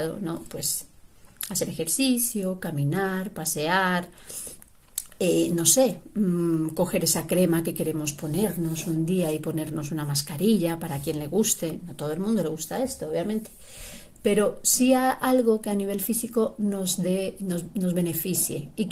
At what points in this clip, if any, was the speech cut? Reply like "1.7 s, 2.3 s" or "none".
none